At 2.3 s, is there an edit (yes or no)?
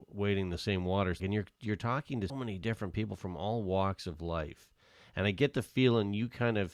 yes